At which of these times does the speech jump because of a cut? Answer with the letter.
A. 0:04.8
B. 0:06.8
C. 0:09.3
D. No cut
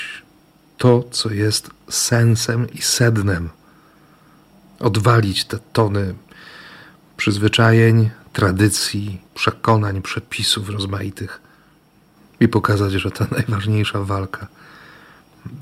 C